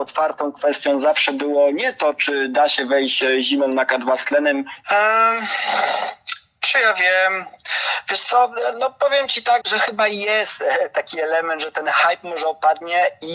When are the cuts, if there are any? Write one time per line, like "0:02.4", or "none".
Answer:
0:04.8
0:09.6

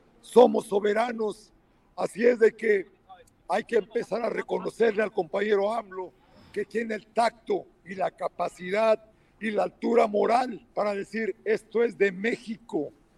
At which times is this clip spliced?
0:03.4
0:10.7

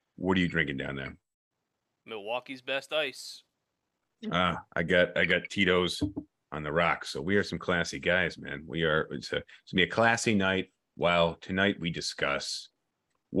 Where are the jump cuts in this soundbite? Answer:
none

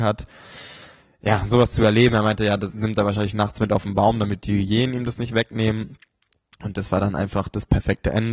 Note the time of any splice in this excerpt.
none

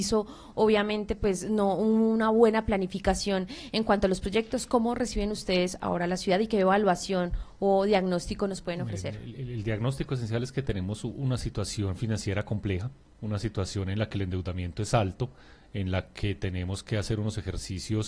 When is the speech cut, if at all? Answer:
none

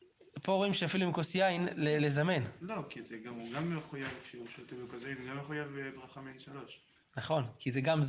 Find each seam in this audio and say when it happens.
none

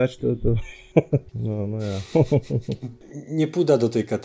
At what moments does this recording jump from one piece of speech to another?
0:01.3

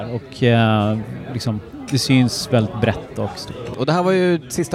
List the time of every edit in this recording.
0:03.7

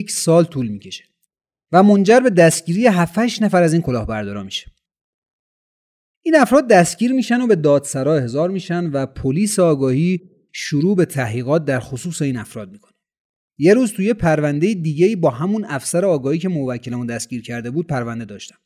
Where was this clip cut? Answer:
none

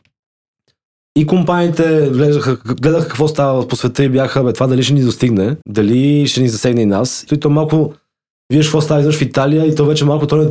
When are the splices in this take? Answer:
0:05.6
0:07.3

